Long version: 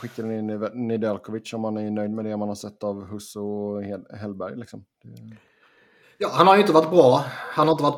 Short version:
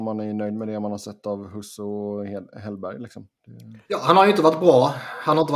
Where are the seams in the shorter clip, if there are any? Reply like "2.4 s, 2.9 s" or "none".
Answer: 3.8 s